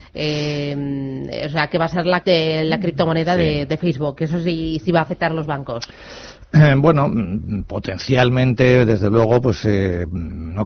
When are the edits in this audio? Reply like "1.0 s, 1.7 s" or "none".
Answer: 2.2 s